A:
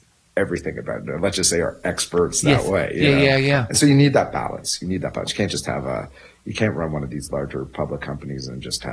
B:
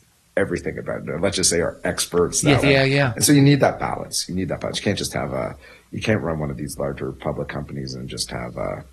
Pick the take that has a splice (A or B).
B